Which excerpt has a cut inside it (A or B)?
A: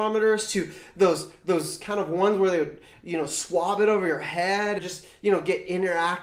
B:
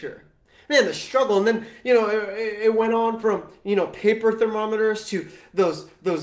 A